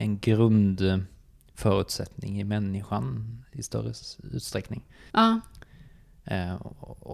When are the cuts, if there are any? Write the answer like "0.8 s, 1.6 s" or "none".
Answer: 5.1 s